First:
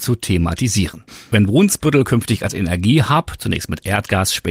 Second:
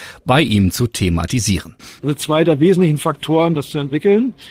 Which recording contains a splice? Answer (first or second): second